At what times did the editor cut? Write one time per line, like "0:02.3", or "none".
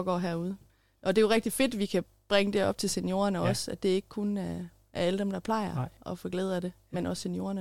none